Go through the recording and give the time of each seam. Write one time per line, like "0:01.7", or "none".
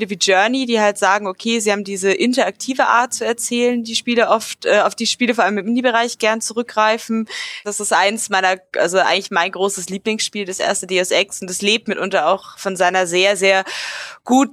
0:07.6